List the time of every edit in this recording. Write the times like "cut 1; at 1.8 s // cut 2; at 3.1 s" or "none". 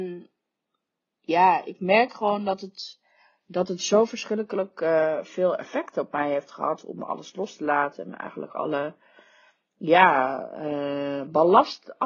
none